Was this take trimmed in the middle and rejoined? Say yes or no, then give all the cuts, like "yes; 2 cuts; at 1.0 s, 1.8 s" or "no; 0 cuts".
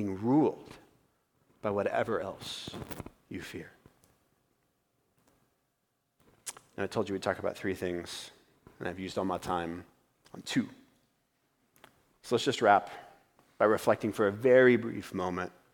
no; 0 cuts